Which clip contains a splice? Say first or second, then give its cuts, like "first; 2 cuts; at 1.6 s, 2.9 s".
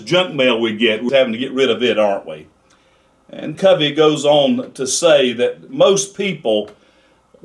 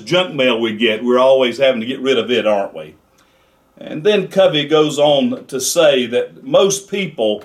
first; 2 cuts; at 1.1 s, 3.5 s